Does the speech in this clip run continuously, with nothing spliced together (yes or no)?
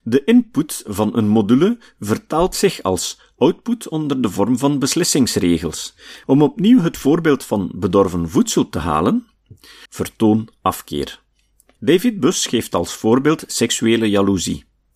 no